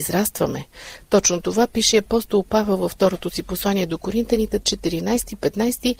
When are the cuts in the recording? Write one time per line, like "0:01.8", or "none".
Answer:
0:04.6